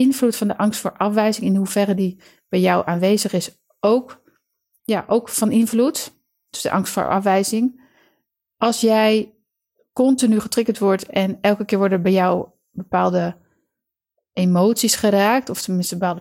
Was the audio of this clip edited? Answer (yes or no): no